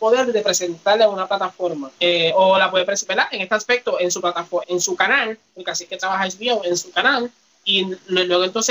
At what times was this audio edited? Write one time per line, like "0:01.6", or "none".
0:01.9
0:04.6